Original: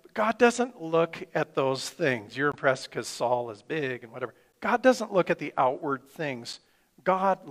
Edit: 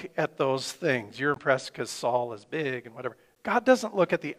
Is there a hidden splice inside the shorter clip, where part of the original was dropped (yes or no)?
no